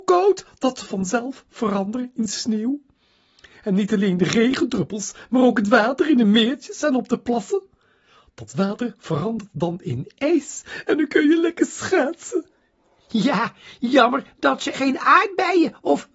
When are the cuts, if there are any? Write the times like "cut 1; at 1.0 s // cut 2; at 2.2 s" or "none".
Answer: cut 1; at 14.7 s